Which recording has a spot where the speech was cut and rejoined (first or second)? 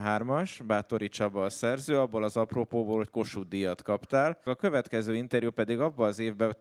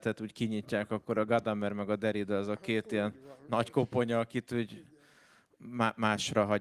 first